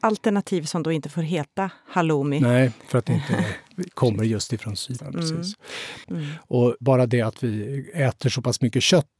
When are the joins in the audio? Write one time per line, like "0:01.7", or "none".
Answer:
0:05.0
0:06.0

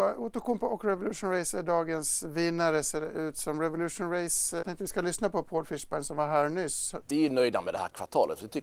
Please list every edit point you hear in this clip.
0:04.6
0:07.0

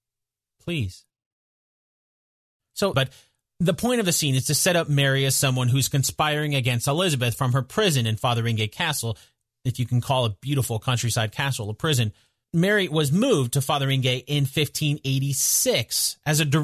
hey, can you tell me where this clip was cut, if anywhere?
0:02.9
0:12.4

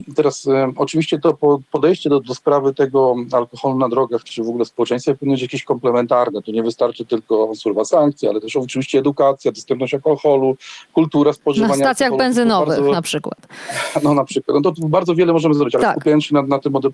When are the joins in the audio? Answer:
0:02.2

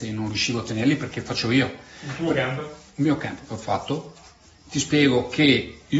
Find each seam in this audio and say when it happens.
none

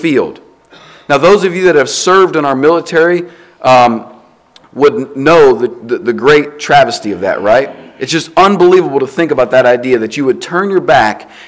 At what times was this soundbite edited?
none

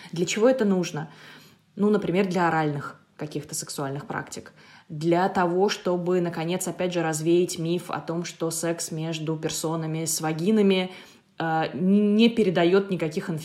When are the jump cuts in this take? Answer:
none

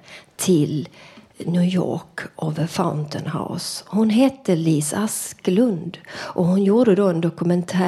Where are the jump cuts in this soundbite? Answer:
0:01.3

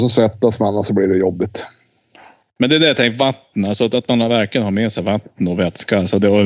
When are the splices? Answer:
none

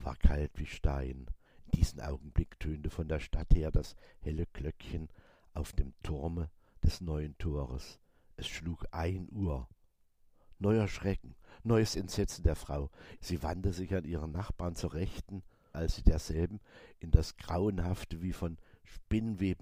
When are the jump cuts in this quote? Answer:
0:01.5
0:13.2
0:15.7

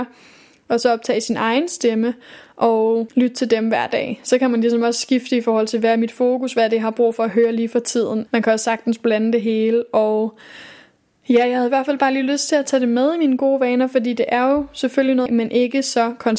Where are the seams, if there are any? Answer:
0:08.3
0:15.3

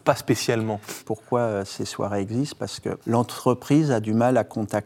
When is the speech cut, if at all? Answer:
0:01.0
0:03.0

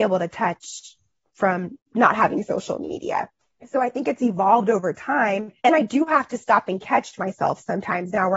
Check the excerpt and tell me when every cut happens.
0:05.6

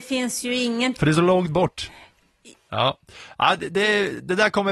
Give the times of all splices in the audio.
0:02.5

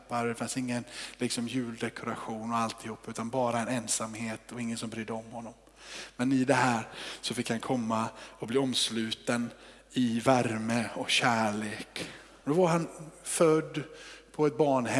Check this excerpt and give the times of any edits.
0:12.4

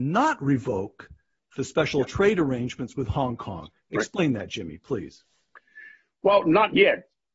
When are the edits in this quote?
none

